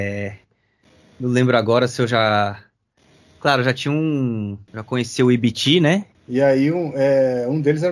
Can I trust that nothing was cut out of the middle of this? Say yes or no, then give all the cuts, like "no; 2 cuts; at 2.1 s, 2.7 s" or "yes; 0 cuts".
no; 2 cuts; at 4.7 s, 6.1 s